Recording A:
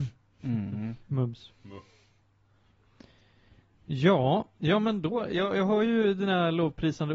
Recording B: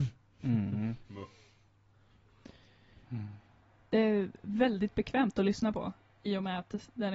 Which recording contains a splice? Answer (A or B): B